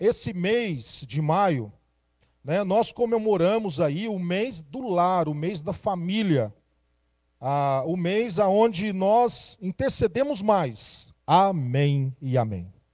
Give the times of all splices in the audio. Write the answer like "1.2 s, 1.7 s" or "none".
11.1 s